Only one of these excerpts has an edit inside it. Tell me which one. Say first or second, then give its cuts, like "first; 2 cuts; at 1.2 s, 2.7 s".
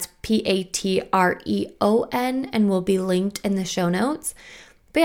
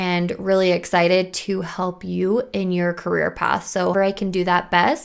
second; 1 cut; at 3.9 s